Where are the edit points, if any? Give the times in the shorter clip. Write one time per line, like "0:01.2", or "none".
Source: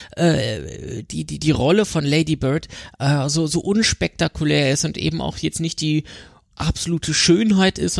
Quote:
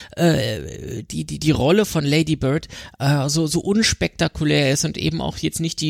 none